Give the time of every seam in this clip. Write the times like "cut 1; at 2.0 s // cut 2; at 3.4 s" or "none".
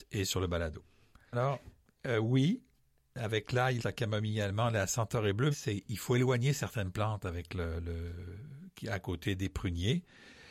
cut 1; at 1.3 s // cut 2; at 3.8 s // cut 3; at 5.5 s

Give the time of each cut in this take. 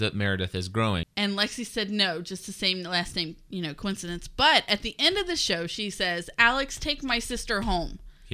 cut 1; at 1.0 s

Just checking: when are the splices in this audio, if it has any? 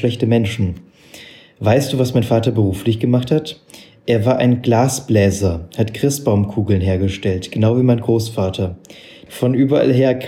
cut 1; at 9.3 s

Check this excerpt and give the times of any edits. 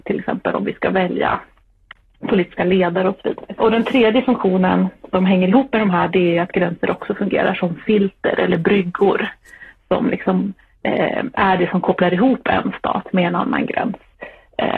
cut 1; at 3.6 s

